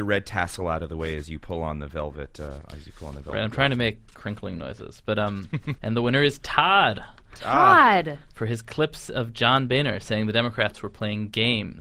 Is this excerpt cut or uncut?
cut